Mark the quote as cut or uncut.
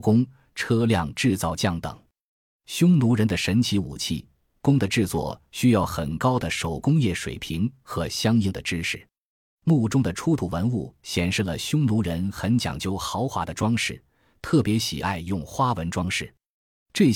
uncut